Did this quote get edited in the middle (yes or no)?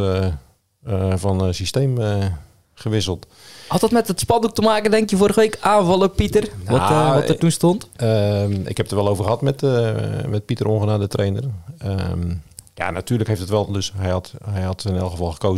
yes